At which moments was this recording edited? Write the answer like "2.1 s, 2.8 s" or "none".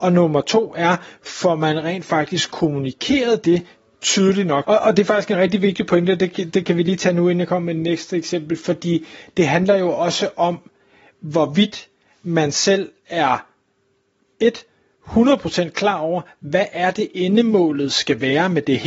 4.6 s